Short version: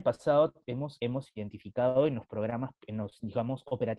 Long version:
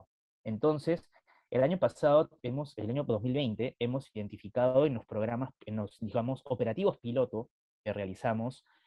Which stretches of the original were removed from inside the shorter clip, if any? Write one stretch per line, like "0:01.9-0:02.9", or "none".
0:02.7-0:03.8